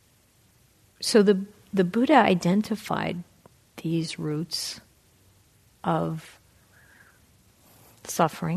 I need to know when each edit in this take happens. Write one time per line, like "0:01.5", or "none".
none